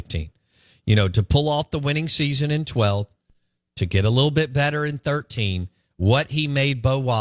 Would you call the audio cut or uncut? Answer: uncut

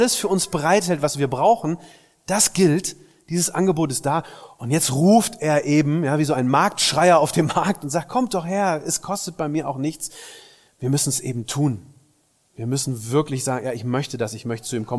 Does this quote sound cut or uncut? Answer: uncut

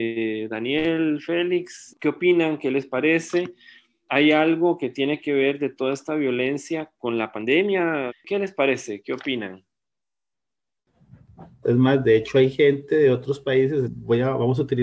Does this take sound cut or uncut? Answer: cut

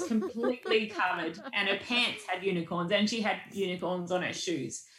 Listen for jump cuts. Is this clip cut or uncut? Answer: uncut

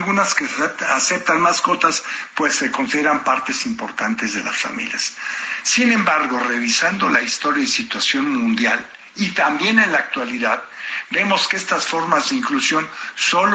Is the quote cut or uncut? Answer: uncut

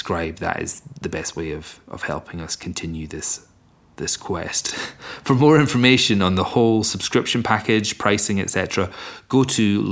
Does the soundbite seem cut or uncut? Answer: uncut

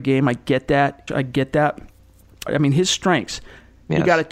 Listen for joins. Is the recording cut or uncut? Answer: cut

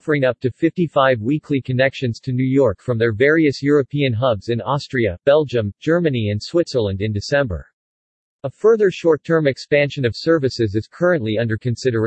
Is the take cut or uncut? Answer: uncut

